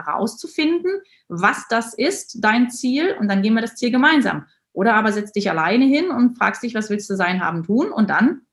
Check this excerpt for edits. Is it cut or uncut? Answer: uncut